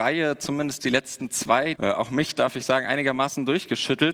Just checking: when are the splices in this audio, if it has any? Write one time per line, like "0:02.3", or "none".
0:01.7